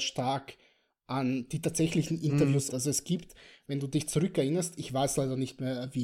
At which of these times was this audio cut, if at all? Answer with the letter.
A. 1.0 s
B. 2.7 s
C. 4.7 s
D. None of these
B